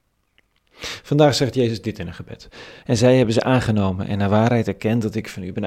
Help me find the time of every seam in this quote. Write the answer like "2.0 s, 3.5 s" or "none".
2.8 s